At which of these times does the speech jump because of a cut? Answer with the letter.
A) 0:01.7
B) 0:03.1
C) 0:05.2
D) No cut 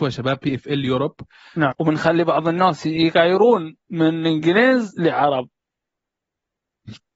A